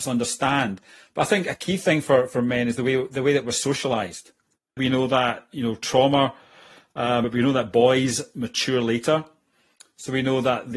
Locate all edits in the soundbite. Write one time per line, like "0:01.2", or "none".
0:04.8
0:07.2